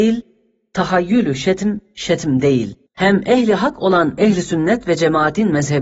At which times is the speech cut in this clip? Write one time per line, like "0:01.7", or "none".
0:02.9